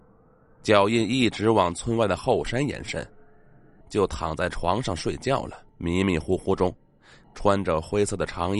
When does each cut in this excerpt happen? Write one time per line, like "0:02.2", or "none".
0:03.8
0:05.7
0:07.2